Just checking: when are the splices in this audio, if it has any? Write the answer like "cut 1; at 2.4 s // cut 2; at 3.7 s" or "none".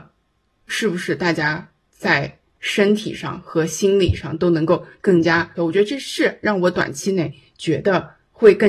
cut 1; at 5.6 s